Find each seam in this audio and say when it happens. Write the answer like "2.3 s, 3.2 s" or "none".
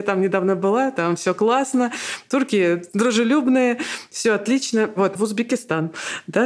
5.2 s